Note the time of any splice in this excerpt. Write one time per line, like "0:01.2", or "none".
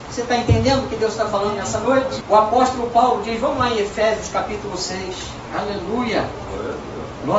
0:02.2